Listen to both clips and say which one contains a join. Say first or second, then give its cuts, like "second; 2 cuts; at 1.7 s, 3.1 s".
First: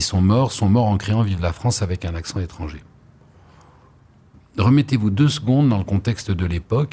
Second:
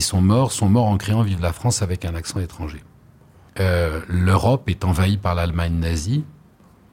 second; 1 cut; at 3.5 s